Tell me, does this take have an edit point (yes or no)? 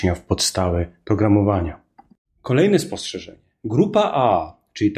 no